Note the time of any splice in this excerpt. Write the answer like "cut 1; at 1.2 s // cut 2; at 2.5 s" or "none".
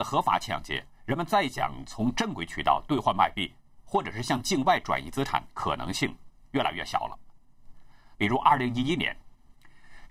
cut 1; at 8.2 s

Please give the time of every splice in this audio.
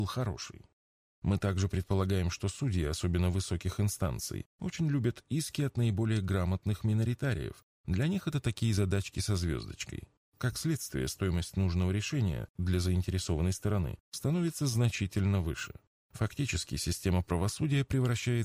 cut 1; at 1.0 s

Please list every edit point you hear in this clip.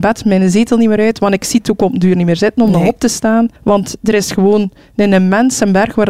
cut 1; at 3.6 s

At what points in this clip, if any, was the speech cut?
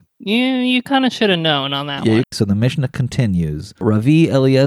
cut 1; at 2.2 s

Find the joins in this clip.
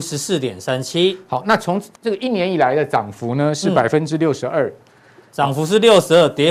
cut 1; at 2.0 s

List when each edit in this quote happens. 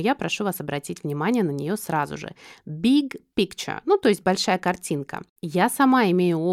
cut 1; at 5.4 s

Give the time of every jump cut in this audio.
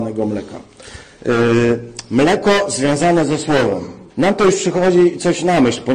cut 1; at 4.1 s

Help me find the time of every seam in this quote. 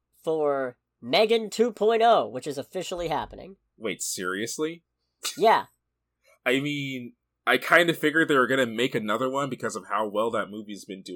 none

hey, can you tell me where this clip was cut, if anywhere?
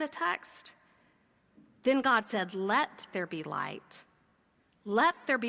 none

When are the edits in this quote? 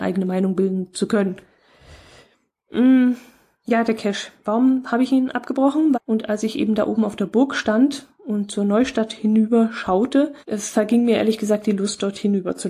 cut 1; at 5.9 s // cut 2; at 10.4 s

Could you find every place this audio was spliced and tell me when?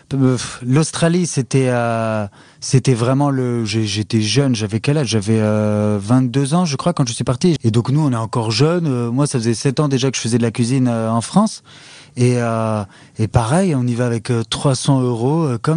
cut 1; at 7.6 s

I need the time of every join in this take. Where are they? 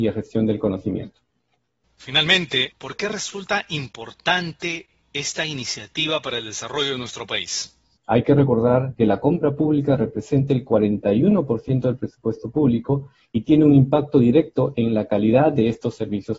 cut 1; at 2.7 s // cut 2; at 8.0 s

